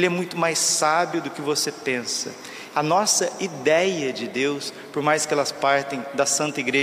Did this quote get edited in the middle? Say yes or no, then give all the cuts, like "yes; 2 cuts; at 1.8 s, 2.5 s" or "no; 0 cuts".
yes; 2 cuts; at 2.7 s, 4.9 s